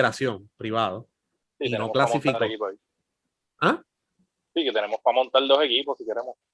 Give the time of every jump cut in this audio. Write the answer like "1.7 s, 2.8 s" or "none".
1.4 s